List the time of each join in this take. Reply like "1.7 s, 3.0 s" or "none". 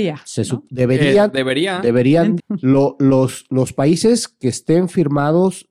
2.4 s